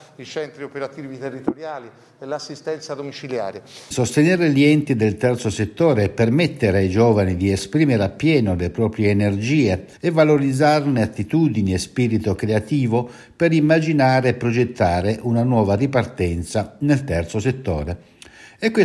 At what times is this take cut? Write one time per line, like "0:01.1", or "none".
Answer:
0:03.9
0:10.0